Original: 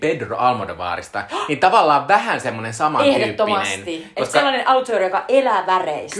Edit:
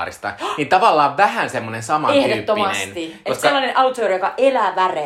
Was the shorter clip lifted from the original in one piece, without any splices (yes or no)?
yes